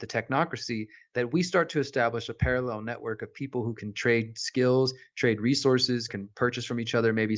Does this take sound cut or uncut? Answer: cut